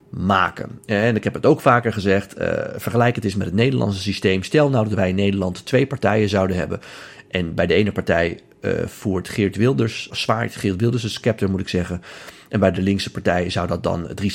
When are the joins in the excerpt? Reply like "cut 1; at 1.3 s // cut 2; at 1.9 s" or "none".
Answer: cut 1; at 10.1 s